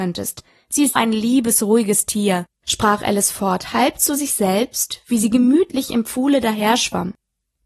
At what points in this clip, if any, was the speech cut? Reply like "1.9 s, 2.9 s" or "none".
1.0 s